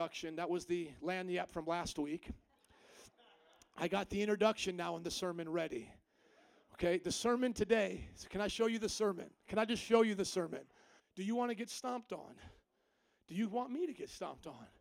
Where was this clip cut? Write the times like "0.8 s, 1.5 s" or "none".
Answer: 11.0 s